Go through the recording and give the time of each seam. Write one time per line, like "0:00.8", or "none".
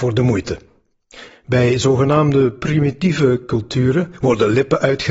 0:01.3